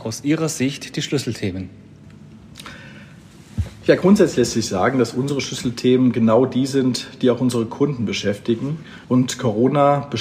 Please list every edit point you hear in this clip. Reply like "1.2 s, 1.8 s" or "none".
9.0 s